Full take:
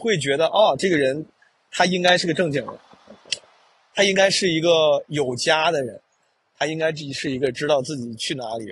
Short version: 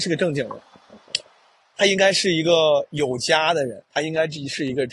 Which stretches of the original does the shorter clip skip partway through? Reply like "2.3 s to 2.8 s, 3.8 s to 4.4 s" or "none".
6.0 s to 6.5 s